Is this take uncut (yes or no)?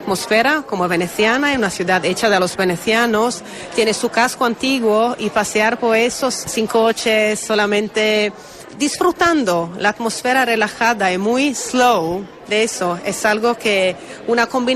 yes